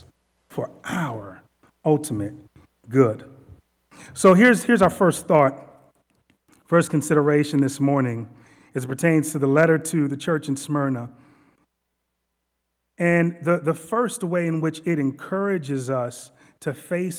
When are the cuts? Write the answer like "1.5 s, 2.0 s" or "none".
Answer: none